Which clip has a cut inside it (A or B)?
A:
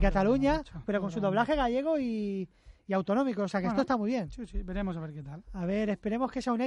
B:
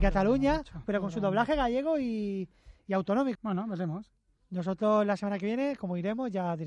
B